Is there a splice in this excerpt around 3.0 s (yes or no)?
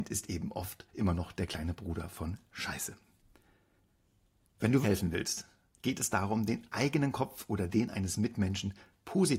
no